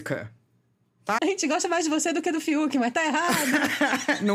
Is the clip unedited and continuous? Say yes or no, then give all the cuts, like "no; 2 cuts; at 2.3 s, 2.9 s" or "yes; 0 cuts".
no; 1 cut; at 1.2 s